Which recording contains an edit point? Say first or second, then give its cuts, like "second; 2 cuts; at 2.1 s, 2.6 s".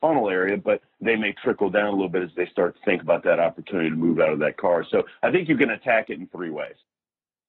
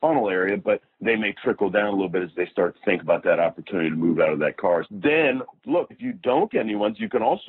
second; 2 cuts; at 4.8 s, 5.9 s